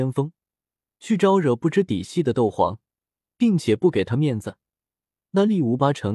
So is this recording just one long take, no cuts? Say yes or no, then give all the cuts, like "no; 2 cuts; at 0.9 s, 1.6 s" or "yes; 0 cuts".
no; 1 cut; at 3.2 s